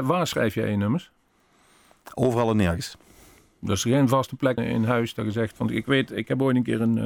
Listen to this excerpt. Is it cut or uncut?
cut